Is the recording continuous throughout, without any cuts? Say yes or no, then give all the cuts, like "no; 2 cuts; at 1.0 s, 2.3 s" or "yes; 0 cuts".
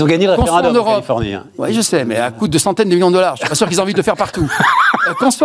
yes; 0 cuts